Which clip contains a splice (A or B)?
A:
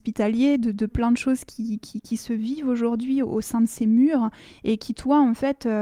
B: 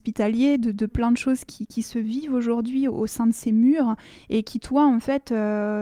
B